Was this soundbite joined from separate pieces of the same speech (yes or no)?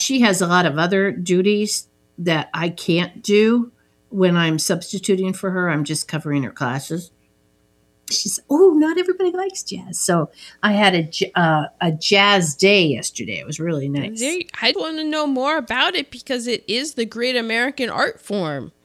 yes